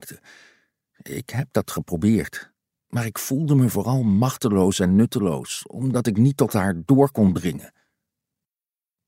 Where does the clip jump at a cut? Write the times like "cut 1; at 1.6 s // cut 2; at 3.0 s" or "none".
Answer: cut 1; at 0.9 s